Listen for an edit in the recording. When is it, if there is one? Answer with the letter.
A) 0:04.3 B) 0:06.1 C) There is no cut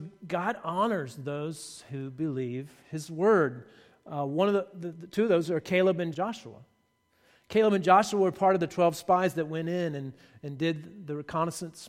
B